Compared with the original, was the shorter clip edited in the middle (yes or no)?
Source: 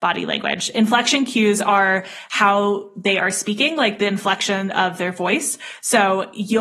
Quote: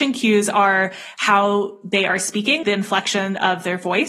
yes